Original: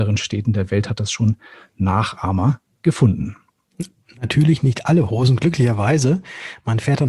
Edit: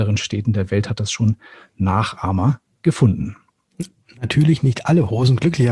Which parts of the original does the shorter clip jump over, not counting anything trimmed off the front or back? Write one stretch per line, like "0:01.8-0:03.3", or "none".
none